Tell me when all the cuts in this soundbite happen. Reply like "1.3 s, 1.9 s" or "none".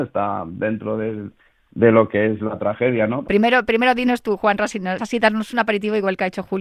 3.2 s, 5.0 s